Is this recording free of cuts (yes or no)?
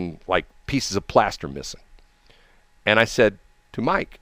yes